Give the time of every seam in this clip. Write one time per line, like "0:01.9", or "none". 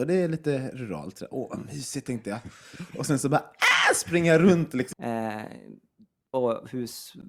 0:04.9